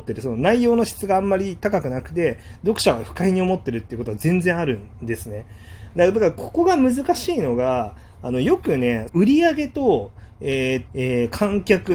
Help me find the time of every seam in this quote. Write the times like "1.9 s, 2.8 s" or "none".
5.9 s, 9.1 s, 10.9 s